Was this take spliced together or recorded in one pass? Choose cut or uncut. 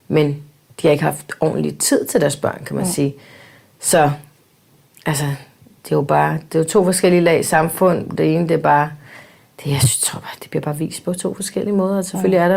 cut